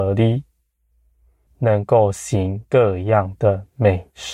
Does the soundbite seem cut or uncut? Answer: cut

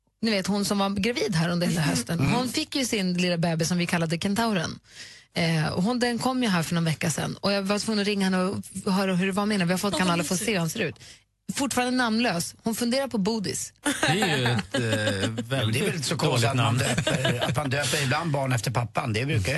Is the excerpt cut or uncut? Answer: cut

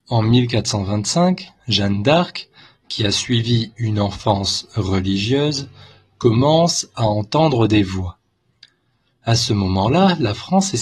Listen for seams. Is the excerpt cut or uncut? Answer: uncut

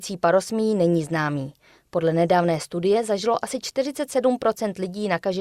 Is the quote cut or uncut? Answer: uncut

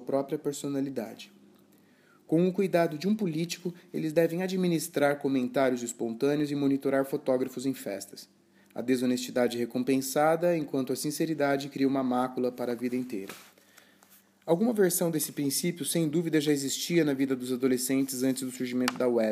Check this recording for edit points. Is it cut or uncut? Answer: uncut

